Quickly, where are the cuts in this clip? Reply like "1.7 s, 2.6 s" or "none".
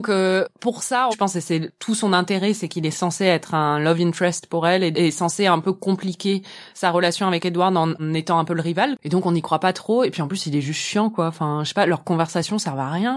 1.1 s